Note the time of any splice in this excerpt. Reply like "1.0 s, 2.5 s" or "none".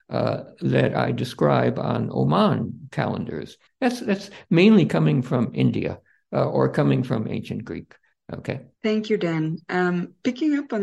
3.7 s, 8.1 s